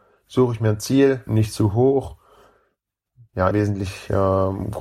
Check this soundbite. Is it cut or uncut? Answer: cut